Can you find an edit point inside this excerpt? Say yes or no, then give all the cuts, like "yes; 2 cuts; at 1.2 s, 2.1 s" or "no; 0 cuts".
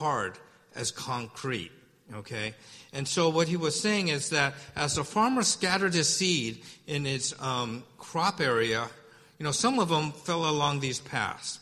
no; 0 cuts